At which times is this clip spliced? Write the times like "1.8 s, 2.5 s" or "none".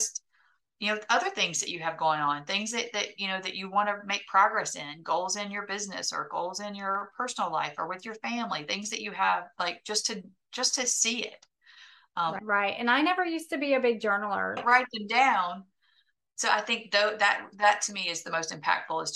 12.4 s, 14.6 s